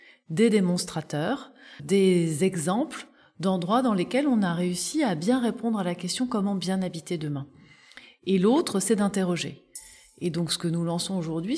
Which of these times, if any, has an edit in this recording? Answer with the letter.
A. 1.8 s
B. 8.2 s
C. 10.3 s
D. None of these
A